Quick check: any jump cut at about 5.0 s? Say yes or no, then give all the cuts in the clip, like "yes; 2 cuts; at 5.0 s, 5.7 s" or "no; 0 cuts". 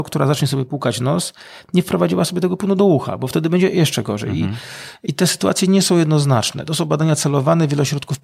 yes; 1 cut; at 5.0 s